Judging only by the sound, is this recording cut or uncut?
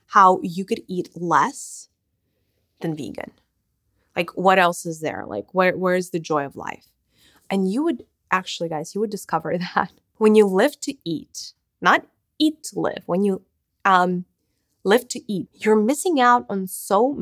cut